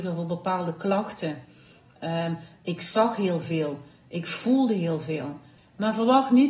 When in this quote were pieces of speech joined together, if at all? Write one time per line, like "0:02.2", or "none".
0:05.6